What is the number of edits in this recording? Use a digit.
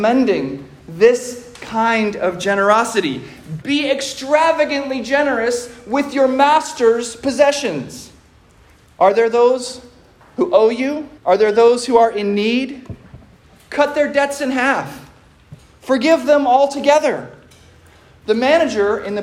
2